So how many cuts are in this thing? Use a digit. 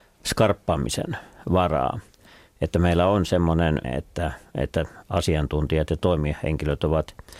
1